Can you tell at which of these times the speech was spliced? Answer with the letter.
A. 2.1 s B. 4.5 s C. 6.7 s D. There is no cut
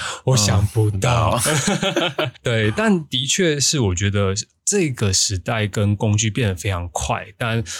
D